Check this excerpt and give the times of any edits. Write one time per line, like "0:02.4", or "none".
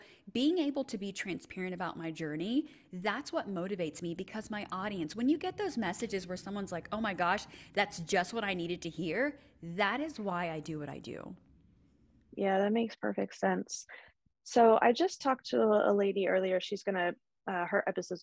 none